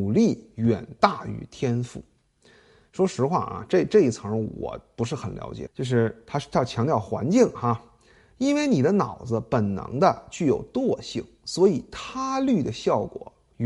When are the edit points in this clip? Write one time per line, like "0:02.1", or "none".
0:05.7